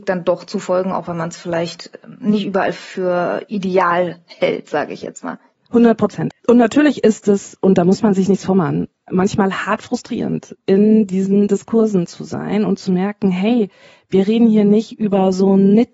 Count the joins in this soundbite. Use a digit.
1